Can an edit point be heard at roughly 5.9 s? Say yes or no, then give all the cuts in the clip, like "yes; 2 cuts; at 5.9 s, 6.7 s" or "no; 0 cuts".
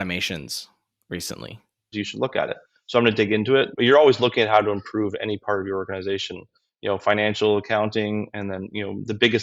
no; 2 cuts; at 1.9 s, 3.7 s